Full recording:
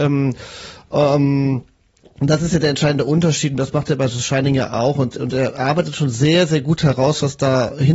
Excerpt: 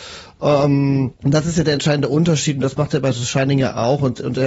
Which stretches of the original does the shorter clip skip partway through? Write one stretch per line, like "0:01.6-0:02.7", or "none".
0:01.7-0:02.1